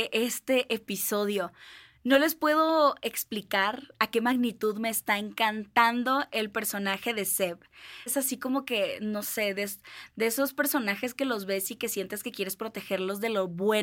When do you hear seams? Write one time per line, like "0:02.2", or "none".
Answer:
0:08.1